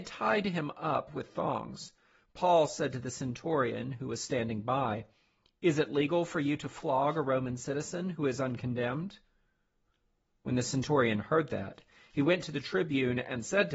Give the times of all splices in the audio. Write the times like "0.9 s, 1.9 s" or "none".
none